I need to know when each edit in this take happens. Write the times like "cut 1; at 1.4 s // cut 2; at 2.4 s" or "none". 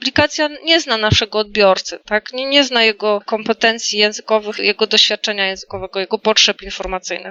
none